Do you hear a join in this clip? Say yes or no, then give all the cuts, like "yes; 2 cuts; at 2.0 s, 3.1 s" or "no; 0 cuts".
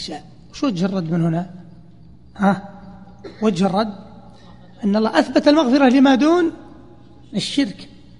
no; 0 cuts